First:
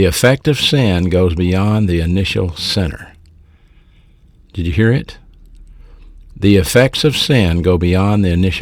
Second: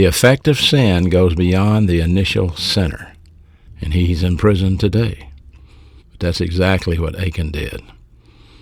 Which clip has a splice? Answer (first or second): second